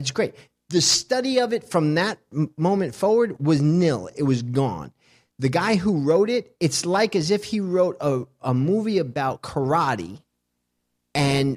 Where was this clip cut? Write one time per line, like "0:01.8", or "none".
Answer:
none